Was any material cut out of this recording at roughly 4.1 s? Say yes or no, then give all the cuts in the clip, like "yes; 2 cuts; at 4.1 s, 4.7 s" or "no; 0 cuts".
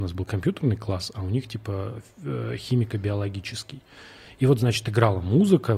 no; 0 cuts